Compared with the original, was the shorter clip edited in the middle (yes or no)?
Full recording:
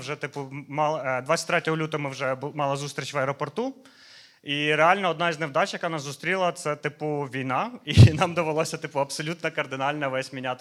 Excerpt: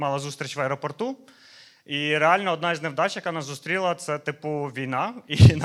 no